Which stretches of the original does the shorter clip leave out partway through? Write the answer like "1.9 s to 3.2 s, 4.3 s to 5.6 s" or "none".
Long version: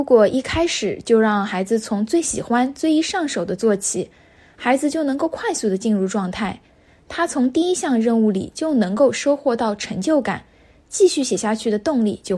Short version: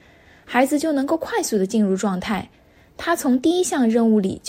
none